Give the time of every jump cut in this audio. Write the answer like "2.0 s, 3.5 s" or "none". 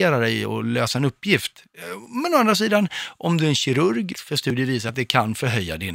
4.1 s